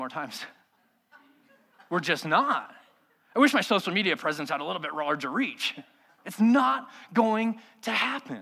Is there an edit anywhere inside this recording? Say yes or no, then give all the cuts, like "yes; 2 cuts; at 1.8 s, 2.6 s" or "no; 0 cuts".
yes; 1 cut; at 6.2 s